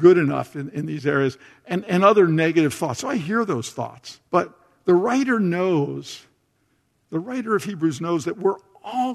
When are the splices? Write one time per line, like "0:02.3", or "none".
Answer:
0:04.3

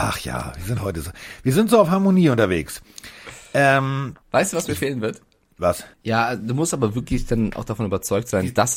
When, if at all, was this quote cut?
0:04.2
0:05.9

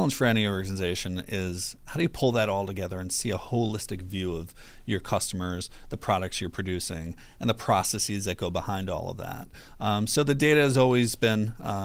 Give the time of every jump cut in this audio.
none

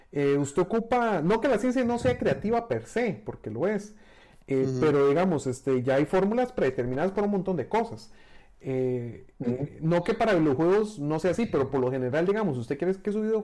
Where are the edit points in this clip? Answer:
none

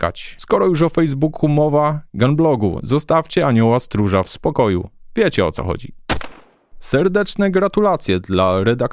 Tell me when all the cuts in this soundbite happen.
none

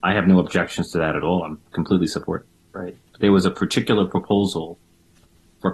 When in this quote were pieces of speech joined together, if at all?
0:02.7

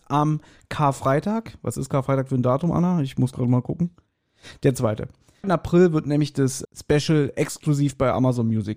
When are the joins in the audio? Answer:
0:05.4
0:06.6

